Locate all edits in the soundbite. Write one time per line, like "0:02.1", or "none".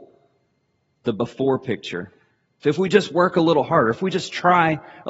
0:02.6